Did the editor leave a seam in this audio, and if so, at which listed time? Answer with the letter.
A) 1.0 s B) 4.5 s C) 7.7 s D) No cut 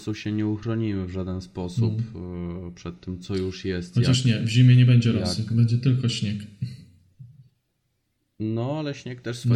D